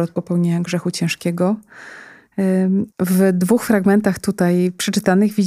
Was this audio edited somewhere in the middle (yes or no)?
yes